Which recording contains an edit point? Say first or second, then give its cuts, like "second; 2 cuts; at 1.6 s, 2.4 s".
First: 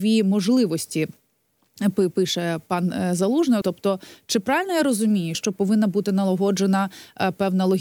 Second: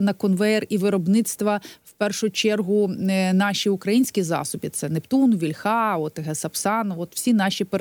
first; 2 cuts; at 3.6 s, 5.3 s